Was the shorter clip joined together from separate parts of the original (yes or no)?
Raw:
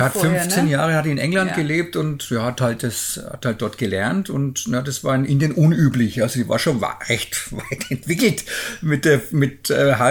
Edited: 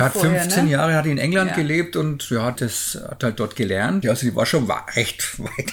yes